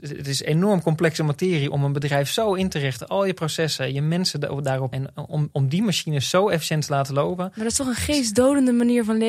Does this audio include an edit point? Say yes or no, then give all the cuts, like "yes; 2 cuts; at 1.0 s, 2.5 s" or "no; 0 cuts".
yes; 1 cut; at 4.9 s